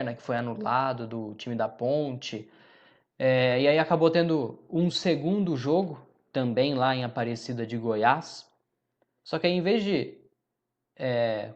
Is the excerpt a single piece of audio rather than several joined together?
yes; 0 cuts

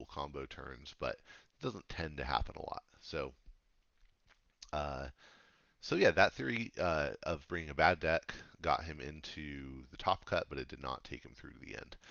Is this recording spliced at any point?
no; 0 cuts

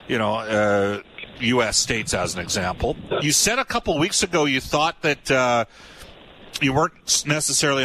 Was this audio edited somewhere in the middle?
yes; 1 cut; at 3.2 s

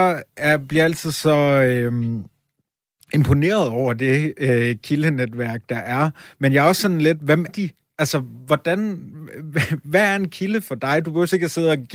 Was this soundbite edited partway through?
yes; 1 cut; at 7.5 s

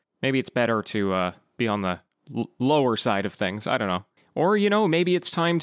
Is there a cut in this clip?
no; 0 cuts

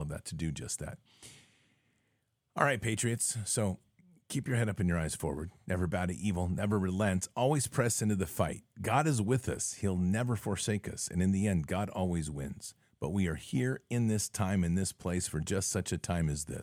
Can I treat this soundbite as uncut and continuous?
yes; 0 cuts

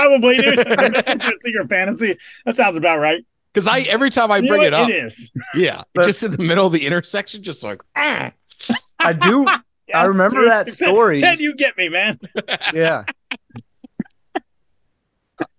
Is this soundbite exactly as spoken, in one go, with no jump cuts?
yes; 0 cuts

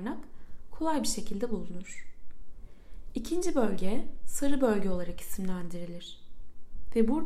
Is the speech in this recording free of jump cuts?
yes; 0 cuts

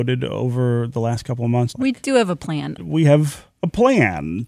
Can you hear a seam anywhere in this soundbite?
yes; 2 cuts; at 1.7 s, 2.8 s

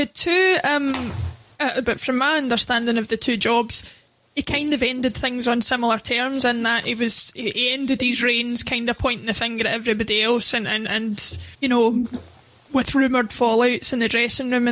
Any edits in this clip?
yes; 2 cuts; at 1.8 s, 11.5 s

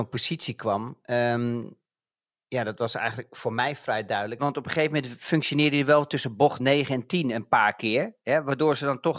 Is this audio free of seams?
no; 1 cut; at 4.4 s

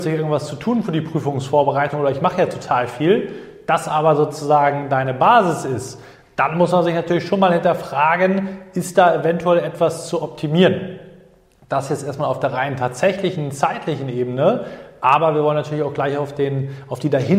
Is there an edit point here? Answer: no; 0 cuts

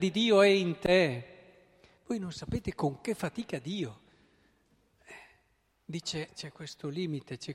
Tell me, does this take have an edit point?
yes; 1 cut; at 6.3 s

